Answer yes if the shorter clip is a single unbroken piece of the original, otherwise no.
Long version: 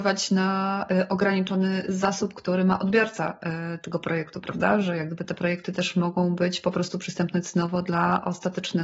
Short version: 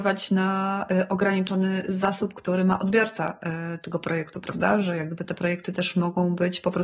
yes